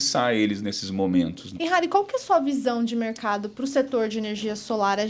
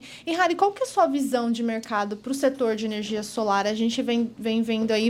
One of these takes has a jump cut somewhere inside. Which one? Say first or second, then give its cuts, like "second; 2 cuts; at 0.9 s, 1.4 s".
first; 1 cut; at 1.6 s